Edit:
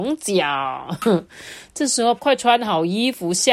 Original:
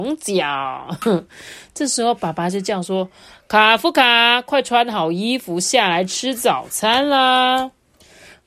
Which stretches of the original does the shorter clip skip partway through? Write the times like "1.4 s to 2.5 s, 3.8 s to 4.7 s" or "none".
2.2 s to 4.4 s